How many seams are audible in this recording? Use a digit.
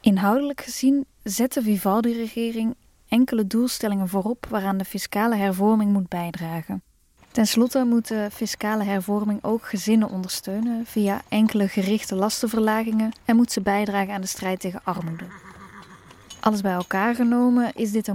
2